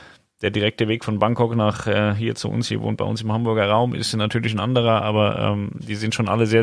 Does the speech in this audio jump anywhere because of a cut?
no; 0 cuts

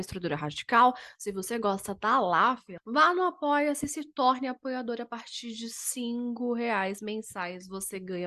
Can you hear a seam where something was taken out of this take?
yes; 1 cut; at 2.8 s

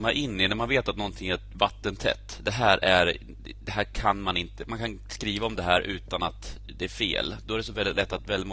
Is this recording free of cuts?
yes; 0 cuts

